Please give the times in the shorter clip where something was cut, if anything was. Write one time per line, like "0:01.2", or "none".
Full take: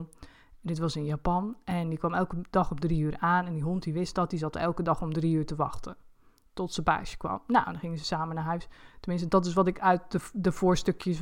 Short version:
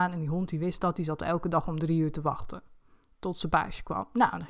none